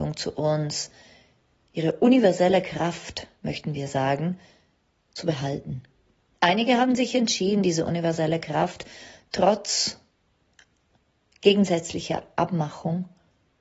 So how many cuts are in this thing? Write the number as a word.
zero